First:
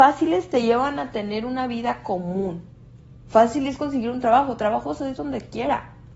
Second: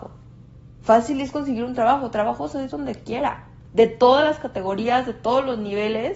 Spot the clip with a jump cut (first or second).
first